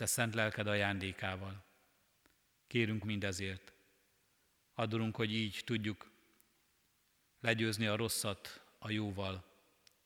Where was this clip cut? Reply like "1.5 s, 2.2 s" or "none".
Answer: 3.0 s